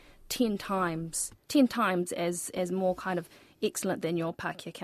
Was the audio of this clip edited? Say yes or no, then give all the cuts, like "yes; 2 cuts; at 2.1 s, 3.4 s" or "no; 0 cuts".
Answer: yes; 1 cut; at 1.4 s